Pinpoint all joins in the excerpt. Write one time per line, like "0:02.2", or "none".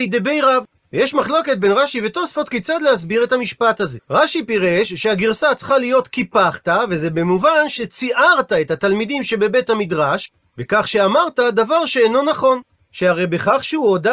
0:04.0
0:12.8

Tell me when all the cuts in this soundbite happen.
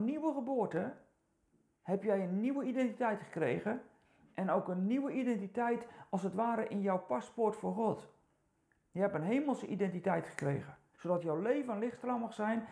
0:10.9

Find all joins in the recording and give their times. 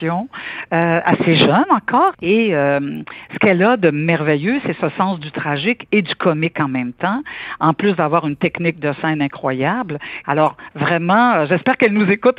0:02.1
0:10.2

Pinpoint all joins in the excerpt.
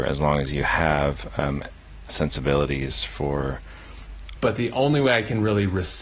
0:02.1
0:04.4

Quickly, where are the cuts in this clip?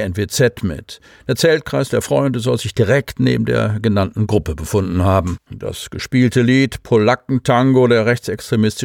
0:05.5

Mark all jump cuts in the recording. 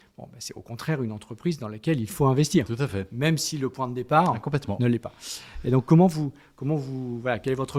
none

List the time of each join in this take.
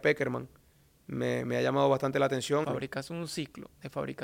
0:02.6

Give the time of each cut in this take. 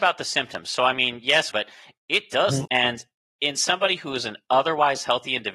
0:01.5
0:02.6

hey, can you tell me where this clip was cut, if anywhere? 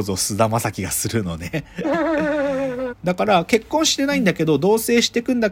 0:02.9

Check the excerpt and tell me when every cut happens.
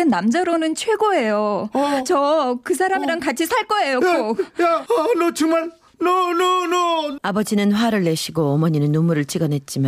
0:04.9
0:07.2

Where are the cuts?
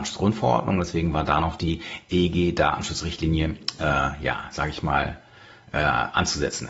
0:03.8

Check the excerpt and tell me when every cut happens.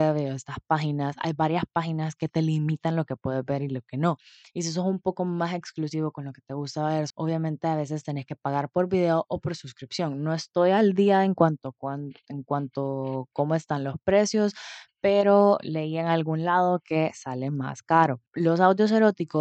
0:07.1

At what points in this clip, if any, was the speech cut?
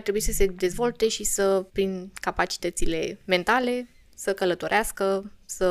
0:01.7

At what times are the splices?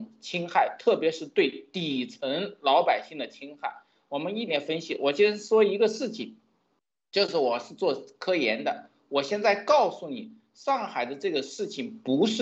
0:04.5

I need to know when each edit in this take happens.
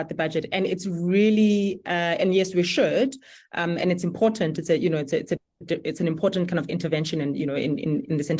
none

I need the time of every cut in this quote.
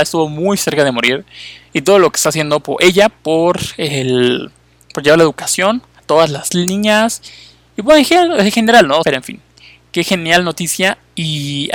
0:09.0

